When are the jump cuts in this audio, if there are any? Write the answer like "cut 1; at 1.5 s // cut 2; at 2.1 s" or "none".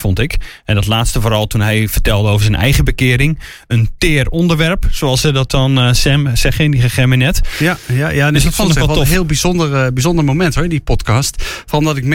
none